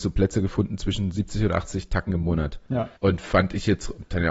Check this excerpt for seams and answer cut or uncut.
cut